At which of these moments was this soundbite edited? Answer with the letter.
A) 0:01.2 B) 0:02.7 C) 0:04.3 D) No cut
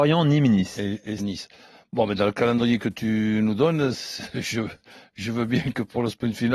A